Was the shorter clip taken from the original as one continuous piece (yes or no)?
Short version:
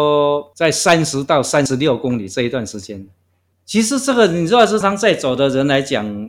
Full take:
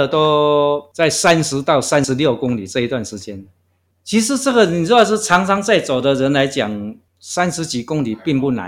no